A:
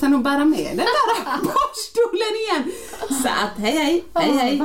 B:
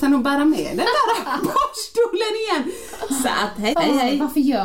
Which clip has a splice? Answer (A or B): B